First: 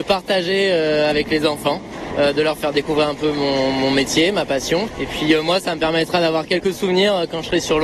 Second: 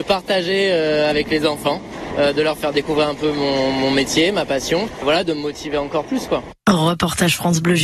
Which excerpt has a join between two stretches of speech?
second; 1 cut; at 5.0 s

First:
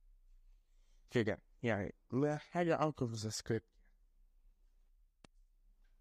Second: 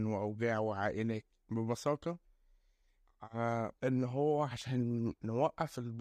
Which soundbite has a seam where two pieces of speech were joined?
second; 1 cut; at 3.8 s

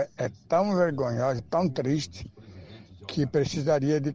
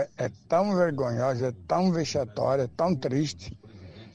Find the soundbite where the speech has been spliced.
first; 1 cut; at 1.4 s

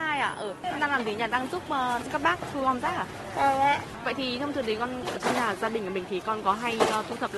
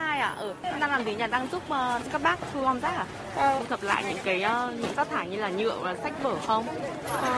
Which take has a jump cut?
second; 1 cut; at 3.6 s

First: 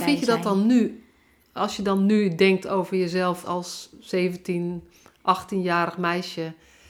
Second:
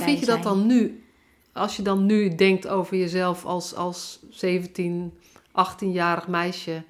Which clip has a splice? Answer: first; 1 cut; at 3.4 s

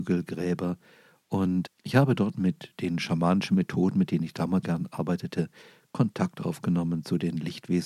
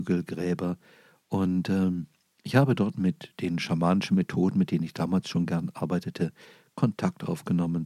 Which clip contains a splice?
first; 2 cuts; at 1.6 s, 4.6 s

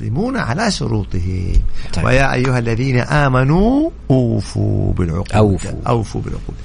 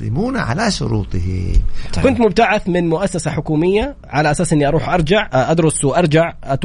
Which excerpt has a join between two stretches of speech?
second; 1 cut; at 2.0 s

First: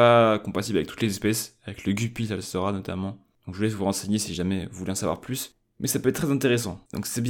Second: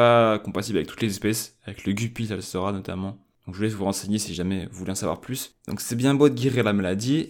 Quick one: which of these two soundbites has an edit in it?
second; 1 cut; at 5.6 s

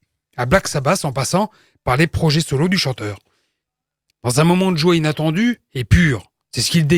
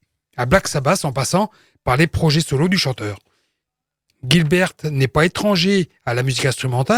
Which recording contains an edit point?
first; 1 cut; at 4.1 s

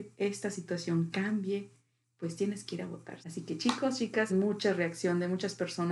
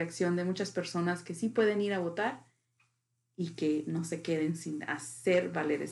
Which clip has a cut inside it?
first; 2 cuts; at 3.2 s, 4.3 s

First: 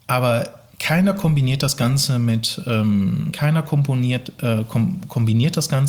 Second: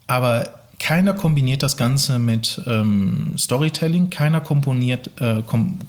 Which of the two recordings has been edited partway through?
first; 1 cut; at 3.3 s

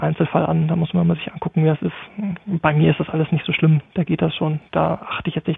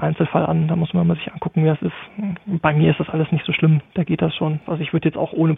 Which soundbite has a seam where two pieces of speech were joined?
second; 1 cut; at 4.7 s

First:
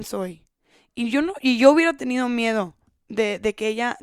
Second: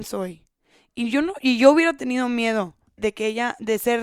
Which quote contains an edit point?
second; 1 cut; at 3.0 s

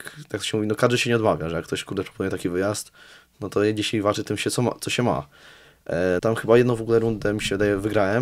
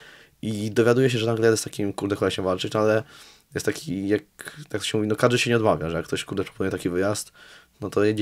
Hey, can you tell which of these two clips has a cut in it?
first; 1 cut; at 6.2 s

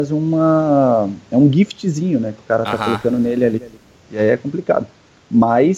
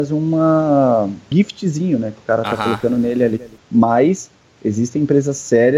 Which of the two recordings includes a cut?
second; 2 cuts; at 1.3 s, 3.6 s

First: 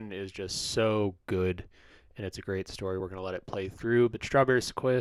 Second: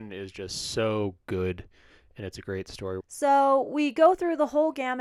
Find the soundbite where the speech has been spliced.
second; 1 cut; at 3.0 s

